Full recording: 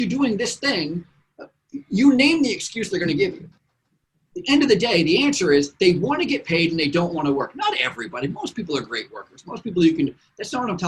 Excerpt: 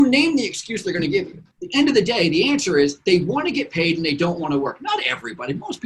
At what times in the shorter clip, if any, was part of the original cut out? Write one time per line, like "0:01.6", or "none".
0:01.5

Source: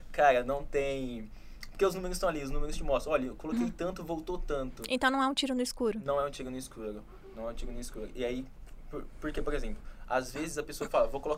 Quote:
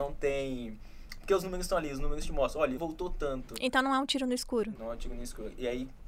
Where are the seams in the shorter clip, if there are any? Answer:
0:02.8
0:04.8

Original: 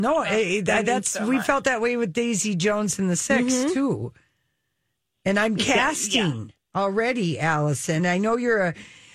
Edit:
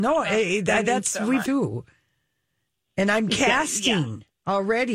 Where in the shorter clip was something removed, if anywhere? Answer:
0:01.5

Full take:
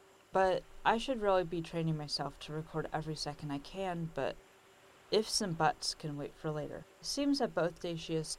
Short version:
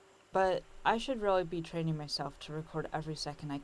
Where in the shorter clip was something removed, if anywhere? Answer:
none

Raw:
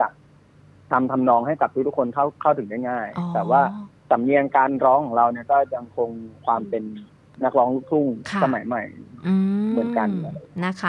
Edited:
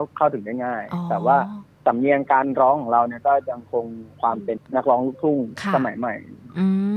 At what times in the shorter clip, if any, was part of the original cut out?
0:04.6

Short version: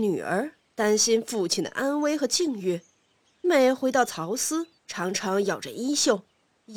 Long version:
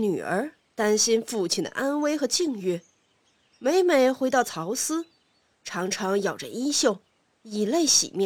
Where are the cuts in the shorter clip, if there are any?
0:03.4
0:04.8

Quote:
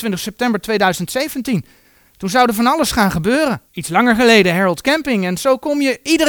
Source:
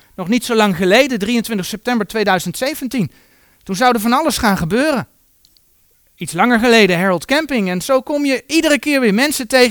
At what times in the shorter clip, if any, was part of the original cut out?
0:03.7

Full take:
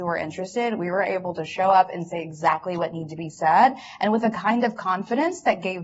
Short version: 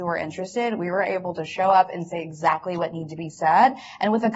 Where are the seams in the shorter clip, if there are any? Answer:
none

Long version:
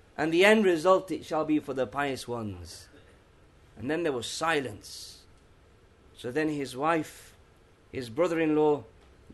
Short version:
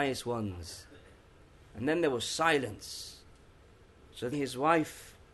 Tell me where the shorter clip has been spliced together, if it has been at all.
0:04.3

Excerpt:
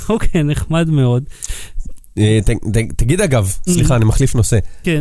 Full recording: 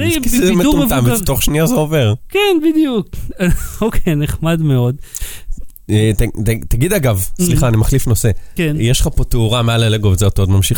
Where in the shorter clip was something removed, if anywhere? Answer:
none

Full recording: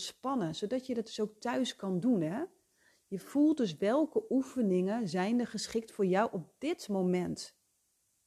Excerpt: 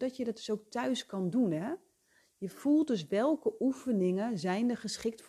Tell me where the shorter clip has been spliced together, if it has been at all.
none

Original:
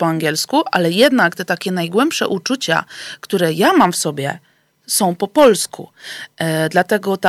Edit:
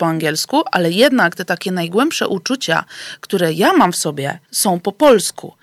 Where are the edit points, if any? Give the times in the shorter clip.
0:04.4

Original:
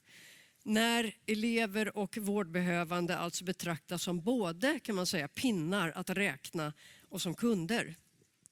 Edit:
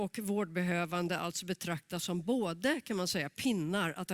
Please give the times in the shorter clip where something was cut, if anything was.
none

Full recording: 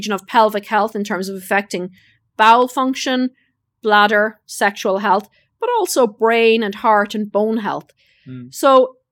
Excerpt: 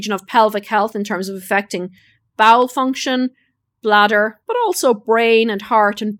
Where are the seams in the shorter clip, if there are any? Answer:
0:04.4

